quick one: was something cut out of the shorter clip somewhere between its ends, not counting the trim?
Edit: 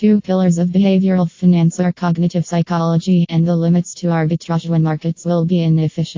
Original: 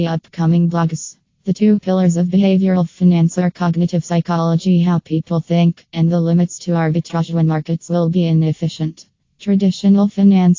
yes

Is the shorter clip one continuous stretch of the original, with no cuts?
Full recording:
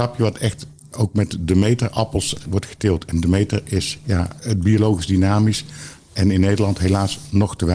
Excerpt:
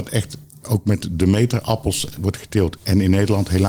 no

